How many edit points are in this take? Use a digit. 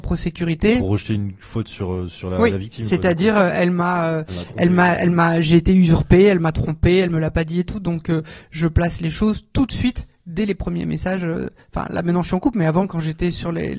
0